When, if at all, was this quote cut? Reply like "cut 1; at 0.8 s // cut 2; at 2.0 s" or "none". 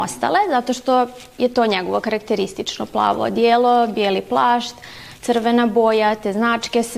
none